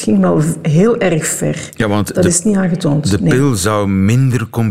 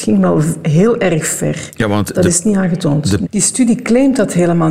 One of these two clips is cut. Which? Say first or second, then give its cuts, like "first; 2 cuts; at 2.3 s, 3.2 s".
second; 1 cut; at 3.2 s